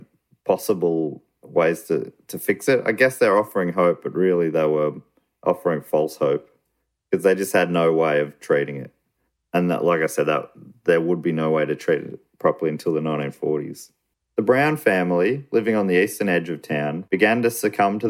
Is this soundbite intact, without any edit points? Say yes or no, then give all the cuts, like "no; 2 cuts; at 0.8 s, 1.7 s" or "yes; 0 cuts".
yes; 0 cuts